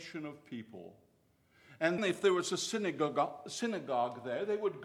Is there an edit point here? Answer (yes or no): yes